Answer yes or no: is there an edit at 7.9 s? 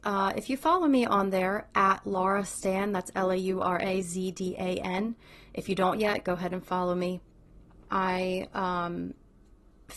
yes